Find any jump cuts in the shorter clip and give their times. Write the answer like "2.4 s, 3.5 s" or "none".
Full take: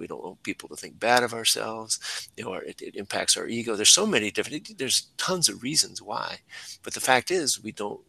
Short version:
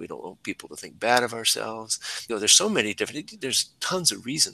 2.3 s